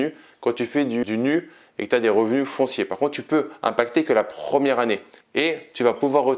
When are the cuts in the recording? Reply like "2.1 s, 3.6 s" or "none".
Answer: 1.0 s, 5.2 s